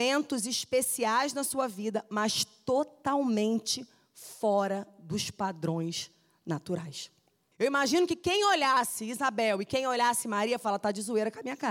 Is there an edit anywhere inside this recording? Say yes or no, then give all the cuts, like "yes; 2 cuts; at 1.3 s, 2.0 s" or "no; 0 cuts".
yes; 1 cut; at 7.5 s